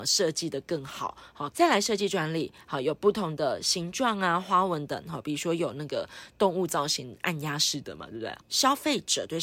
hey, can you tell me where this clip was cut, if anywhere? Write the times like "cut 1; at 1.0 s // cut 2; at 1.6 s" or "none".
cut 1; at 1.5 s // cut 2; at 4.9 s // cut 3; at 8.4 s